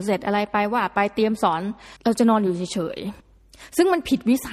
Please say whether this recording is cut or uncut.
cut